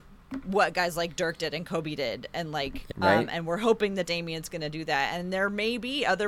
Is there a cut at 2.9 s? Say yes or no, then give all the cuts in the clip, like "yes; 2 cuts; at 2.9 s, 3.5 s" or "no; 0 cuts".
yes; 1 cut; at 2.9 s